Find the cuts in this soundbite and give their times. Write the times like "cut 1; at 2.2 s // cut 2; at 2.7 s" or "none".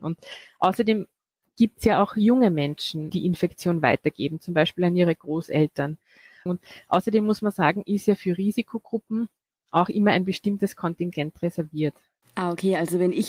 cut 1; at 3.1 s // cut 2; at 6.5 s